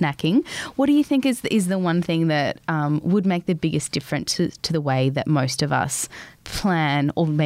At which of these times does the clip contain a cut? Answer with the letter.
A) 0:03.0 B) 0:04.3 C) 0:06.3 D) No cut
C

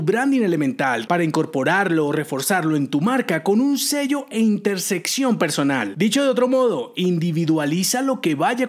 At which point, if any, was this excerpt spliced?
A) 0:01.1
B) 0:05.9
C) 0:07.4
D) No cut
A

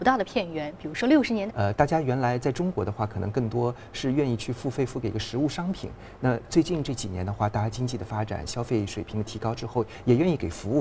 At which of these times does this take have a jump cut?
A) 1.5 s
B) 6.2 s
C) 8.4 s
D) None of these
A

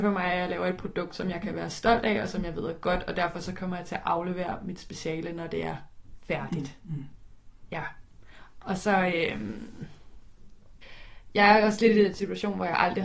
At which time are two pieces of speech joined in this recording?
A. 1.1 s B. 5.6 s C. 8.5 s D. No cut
D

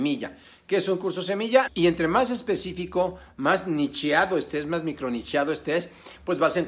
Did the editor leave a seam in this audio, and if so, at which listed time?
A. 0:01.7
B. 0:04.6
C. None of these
A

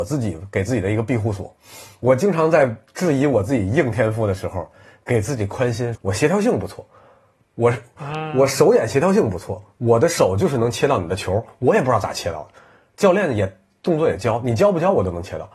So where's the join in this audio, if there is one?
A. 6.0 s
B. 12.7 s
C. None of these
A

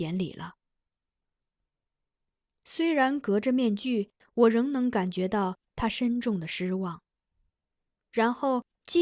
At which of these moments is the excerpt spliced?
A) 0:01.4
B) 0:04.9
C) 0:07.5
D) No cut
C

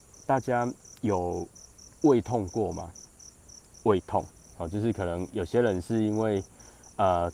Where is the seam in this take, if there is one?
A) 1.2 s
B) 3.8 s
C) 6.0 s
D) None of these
B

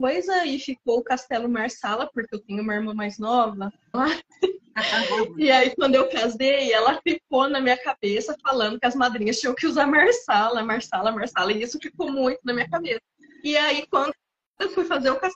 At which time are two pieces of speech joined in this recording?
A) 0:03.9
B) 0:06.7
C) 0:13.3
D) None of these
A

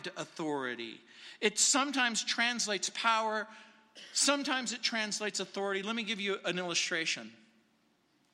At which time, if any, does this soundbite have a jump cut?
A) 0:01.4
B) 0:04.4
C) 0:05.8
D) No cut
D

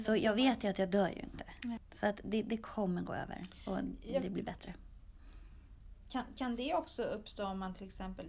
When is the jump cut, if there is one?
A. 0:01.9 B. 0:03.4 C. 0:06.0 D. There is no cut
D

